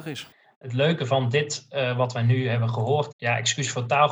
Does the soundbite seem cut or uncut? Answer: cut